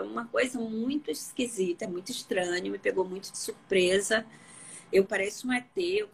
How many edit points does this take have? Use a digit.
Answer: 1